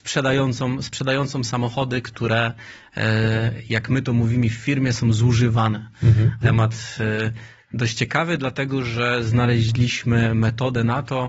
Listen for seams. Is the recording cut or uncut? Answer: cut